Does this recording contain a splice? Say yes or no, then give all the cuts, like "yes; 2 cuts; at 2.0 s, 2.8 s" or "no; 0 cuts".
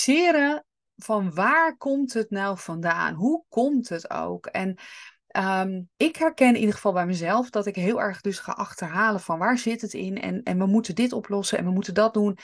yes; 1 cut; at 5.9 s